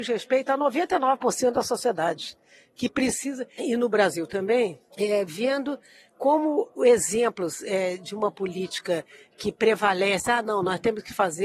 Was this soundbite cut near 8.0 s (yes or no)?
no